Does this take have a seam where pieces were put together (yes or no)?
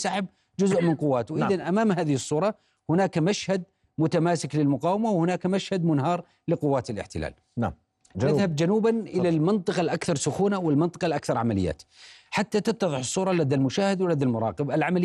no